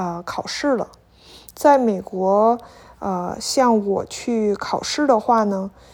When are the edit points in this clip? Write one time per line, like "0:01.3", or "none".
none